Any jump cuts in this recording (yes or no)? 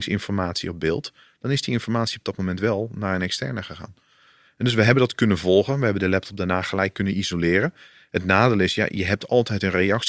no